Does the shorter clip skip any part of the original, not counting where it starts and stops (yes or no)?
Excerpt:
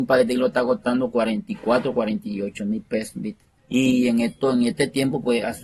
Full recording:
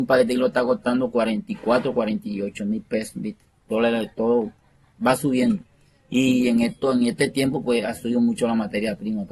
yes